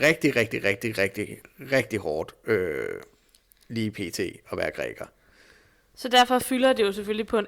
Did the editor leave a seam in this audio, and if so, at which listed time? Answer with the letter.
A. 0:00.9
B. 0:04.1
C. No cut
C